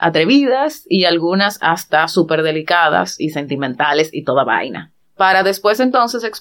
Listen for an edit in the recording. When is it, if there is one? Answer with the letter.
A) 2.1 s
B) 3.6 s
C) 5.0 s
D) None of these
C